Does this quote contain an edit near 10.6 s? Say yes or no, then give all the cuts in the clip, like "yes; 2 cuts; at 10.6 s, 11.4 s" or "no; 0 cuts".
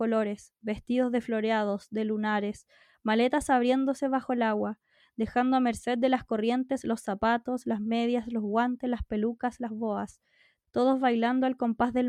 yes; 1 cut; at 10.6 s